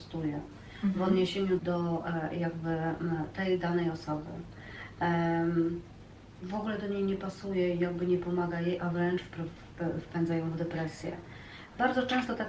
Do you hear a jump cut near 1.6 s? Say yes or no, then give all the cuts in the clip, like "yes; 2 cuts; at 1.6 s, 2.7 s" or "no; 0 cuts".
yes; 1 cut; at 1.6 s